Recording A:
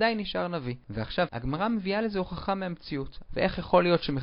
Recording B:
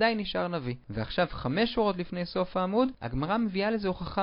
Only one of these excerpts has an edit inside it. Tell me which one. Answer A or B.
A